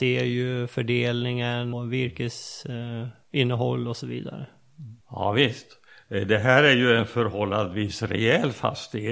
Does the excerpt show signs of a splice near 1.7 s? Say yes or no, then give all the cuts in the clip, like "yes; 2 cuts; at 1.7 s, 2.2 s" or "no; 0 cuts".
yes; 2 cuts; at 1.7 s, 5.0 s